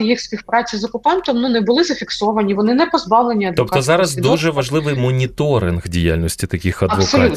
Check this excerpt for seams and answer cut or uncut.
uncut